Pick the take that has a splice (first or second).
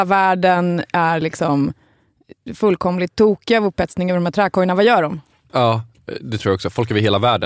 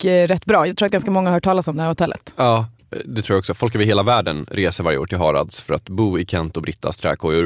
first